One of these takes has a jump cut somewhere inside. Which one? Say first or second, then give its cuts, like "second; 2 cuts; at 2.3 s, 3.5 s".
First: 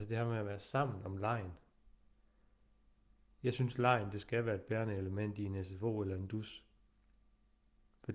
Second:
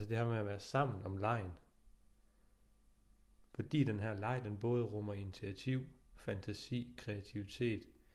second; 1 cut; at 3.4 s